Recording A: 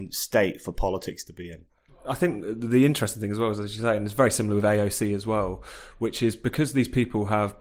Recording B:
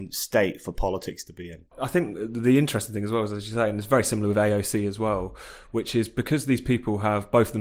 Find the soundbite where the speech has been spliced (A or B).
B